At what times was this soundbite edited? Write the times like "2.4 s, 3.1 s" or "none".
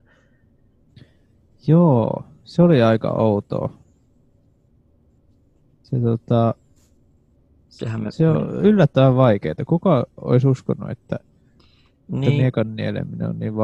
none